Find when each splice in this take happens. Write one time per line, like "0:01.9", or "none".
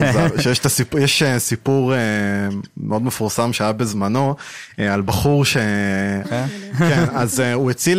0:06.2